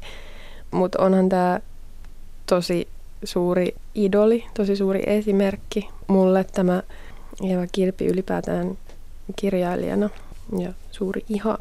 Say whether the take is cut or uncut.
uncut